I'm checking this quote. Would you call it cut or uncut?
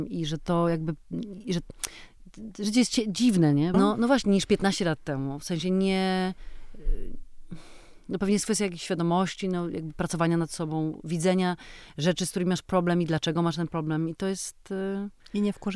cut